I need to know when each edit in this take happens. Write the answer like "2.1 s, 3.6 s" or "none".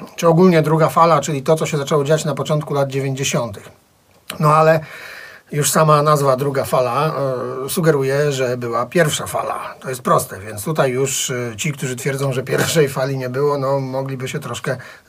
none